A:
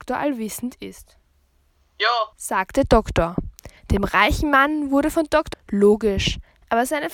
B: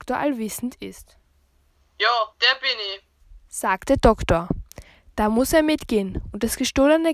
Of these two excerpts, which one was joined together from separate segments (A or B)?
A